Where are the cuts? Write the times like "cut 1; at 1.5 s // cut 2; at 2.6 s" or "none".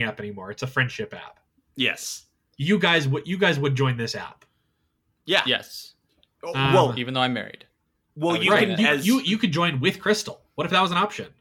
cut 1; at 8.8 s